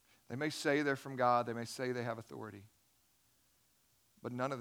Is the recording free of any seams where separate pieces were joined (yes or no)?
yes